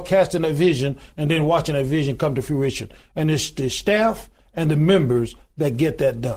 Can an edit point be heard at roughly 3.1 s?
no; 0 cuts

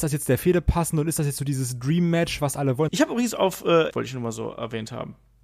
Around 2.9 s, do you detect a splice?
yes; 2 cuts; at 2.9 s, 3.9 s

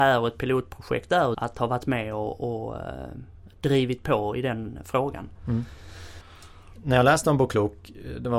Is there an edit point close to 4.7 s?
no; 2 cuts; at 1.3 s, 6.2 s

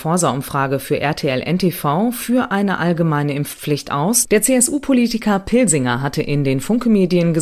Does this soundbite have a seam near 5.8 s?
no; 1 cut; at 4.2 s

